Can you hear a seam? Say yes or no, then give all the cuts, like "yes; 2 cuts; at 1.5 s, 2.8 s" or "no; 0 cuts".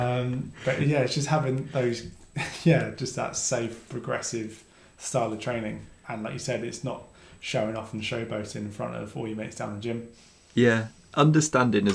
no; 0 cuts